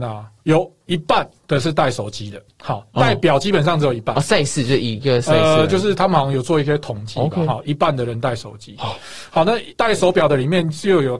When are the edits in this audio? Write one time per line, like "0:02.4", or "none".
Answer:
0:07.6